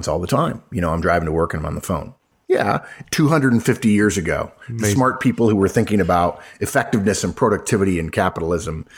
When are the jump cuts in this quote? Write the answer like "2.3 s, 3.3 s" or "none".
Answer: 3.0 s